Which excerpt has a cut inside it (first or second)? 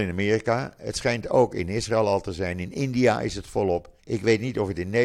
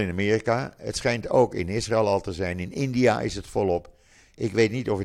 first